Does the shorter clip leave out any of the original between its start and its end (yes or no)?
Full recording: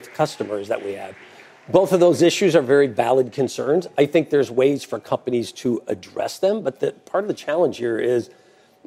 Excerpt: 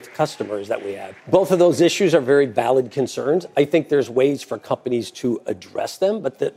yes